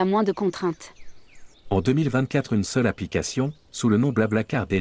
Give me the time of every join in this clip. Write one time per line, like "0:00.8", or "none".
0:01.5